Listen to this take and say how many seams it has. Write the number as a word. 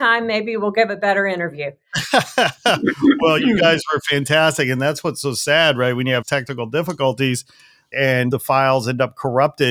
zero